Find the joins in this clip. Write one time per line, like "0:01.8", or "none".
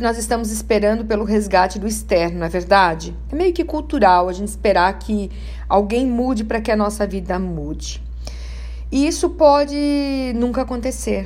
none